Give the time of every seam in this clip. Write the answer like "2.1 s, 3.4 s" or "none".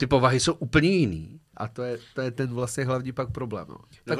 1.5 s